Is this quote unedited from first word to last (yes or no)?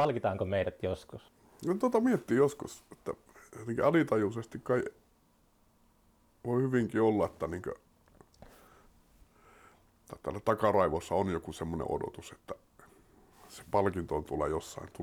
yes